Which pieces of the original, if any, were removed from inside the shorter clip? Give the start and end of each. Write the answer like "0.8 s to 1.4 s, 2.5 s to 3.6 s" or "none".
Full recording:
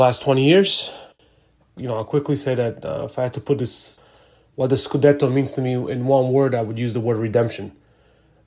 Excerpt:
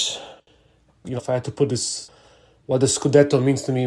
1.9 s to 3.1 s

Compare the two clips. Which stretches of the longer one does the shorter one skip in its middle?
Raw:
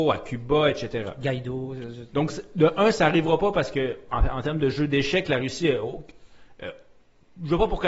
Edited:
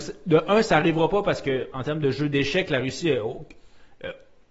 4.0 s to 4.3 s

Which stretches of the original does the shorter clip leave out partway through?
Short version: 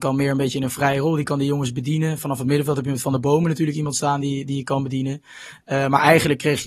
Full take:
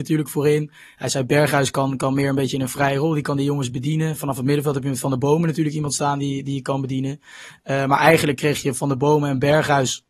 none

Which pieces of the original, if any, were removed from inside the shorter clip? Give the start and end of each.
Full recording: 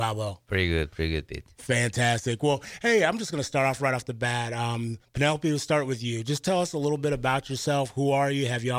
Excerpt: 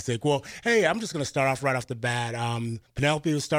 none

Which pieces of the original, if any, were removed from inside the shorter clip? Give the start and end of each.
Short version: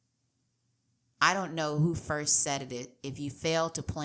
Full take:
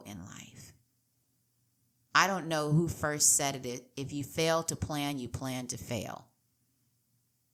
none

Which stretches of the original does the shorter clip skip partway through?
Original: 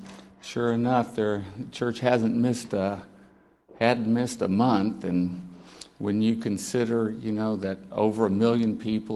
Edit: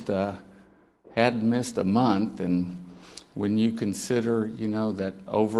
none

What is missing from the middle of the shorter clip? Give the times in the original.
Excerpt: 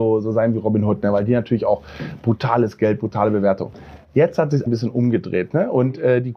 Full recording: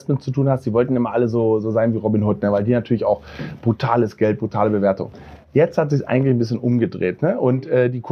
6.1 s to 6.3 s

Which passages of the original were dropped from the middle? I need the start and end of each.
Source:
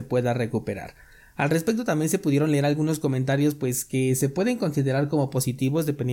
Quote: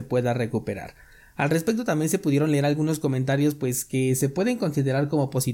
none

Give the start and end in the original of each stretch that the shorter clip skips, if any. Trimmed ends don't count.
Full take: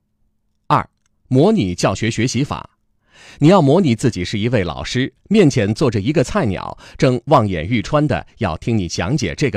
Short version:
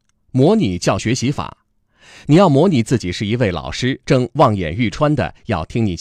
2.0 s to 2.1 s, 5.2 s to 7.0 s

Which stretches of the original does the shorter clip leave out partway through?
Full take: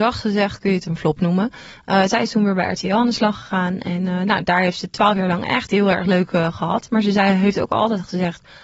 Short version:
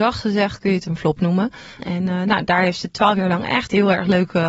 1.8 s to 3.8 s

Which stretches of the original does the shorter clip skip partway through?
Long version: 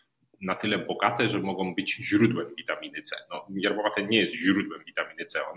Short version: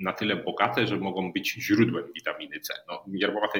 none

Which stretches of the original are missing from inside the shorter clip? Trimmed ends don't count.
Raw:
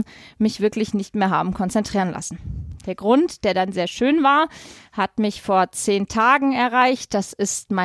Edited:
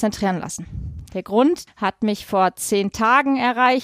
3.4 s to 4.8 s

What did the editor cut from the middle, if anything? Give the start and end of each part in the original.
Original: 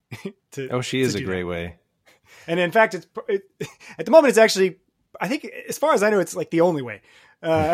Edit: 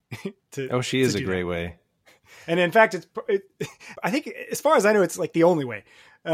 4.0 s to 5.1 s

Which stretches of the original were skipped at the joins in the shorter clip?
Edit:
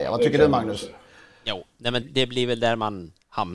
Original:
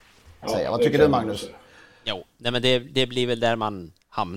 2.6 s to 2.8 s

